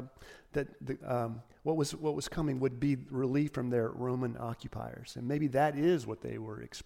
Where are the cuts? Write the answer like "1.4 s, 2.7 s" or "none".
1.0 s